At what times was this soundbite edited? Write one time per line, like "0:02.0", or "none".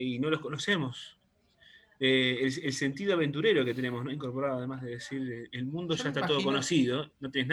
none